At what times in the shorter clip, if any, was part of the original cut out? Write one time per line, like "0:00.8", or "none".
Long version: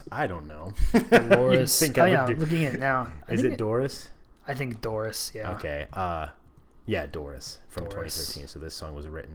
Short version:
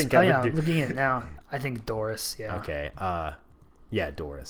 0:01.4